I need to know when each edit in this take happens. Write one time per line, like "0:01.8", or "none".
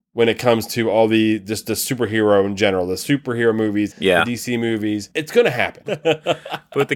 0:03.9
0:05.8